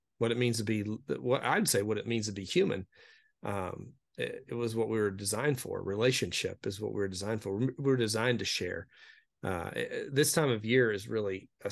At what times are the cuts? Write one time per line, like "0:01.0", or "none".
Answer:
none